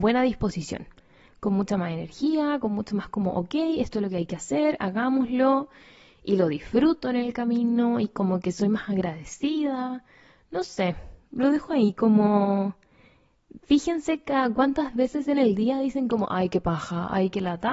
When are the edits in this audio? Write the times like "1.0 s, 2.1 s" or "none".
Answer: none